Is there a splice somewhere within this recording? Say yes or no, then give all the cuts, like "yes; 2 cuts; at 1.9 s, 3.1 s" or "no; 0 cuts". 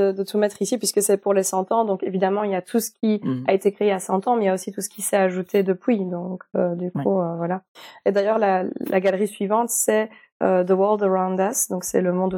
no; 0 cuts